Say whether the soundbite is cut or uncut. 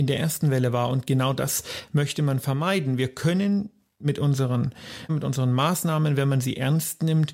cut